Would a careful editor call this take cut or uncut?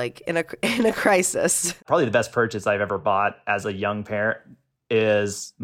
uncut